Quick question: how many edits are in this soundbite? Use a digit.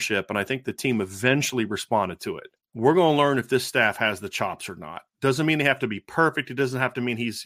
1